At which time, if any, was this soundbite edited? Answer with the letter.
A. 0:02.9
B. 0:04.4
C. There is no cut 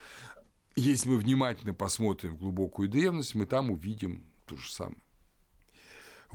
B